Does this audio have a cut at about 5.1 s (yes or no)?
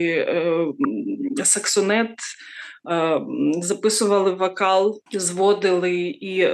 yes